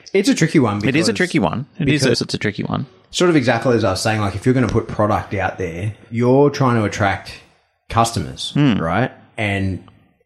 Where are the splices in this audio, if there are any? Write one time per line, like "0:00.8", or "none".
0:02.1